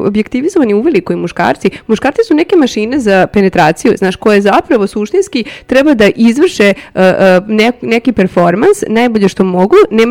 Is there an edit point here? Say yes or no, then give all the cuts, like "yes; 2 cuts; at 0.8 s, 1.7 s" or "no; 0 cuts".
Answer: no; 0 cuts